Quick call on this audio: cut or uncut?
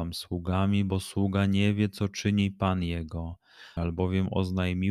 cut